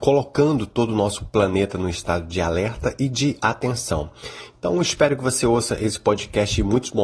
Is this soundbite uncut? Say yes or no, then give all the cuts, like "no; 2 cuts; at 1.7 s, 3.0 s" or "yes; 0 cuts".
yes; 0 cuts